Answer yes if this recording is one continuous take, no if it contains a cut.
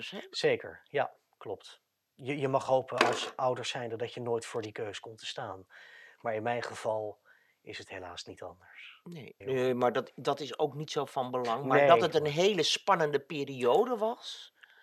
no